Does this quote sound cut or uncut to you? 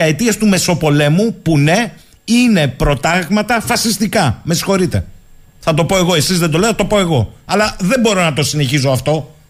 uncut